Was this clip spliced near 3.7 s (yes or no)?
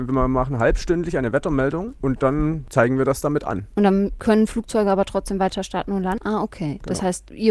no